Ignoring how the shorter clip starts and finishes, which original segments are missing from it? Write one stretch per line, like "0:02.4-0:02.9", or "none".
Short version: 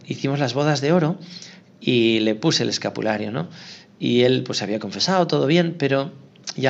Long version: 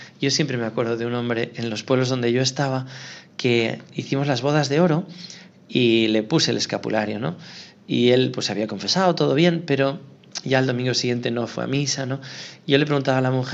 none